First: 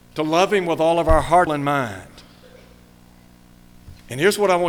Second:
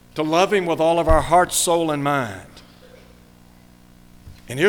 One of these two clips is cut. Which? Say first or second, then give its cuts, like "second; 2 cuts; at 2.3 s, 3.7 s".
first; 1 cut; at 1.5 s